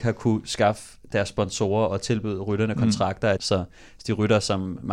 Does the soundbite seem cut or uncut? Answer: cut